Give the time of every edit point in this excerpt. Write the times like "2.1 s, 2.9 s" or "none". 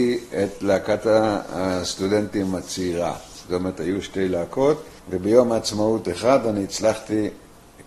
5.0 s